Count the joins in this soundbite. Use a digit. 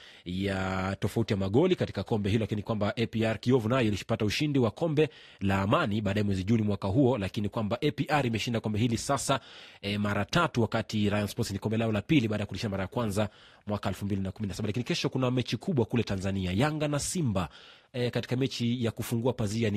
0